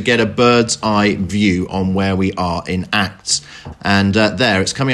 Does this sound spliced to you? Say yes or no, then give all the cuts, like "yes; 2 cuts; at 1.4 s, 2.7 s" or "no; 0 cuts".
yes; 1 cut; at 3.7 s